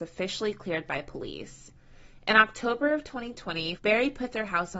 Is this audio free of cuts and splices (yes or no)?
no